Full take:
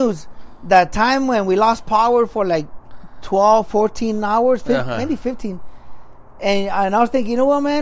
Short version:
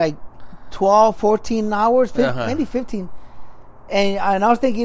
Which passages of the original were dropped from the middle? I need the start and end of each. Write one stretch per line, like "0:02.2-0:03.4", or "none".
none